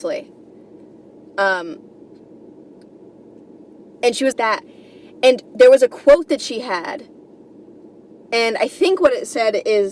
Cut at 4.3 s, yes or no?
yes